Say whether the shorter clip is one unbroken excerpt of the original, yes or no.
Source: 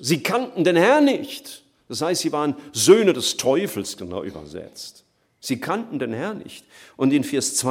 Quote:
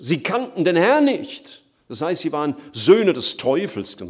yes